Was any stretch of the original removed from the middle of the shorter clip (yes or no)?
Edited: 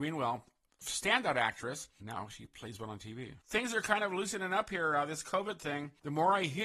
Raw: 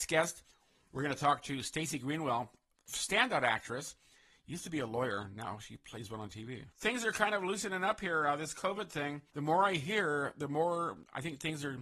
yes